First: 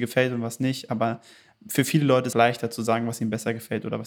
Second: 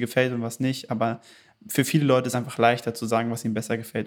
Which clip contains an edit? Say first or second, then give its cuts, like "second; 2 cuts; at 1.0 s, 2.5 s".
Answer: first; 1 cut; at 2.3 s